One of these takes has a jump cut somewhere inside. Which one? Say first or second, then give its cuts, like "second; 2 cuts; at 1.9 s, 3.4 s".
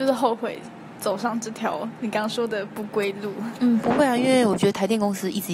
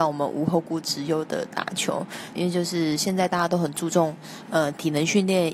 second; 1 cut; at 2.3 s